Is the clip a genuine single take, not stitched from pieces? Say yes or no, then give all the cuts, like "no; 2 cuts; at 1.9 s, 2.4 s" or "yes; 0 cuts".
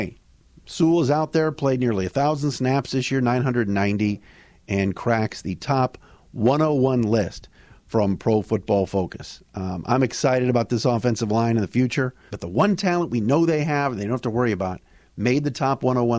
no; 1 cut; at 12.3 s